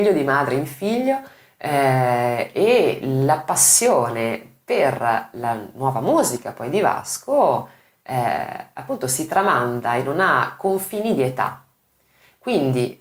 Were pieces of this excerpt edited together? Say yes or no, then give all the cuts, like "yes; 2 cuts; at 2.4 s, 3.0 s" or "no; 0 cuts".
no; 0 cuts